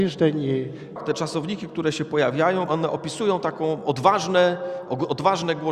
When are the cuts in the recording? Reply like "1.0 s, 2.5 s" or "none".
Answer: 1.0 s, 2.7 s